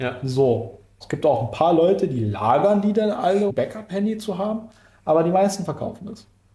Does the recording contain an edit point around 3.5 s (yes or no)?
yes